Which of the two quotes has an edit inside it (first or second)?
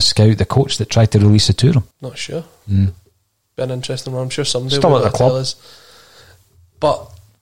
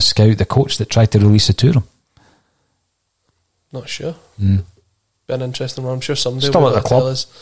first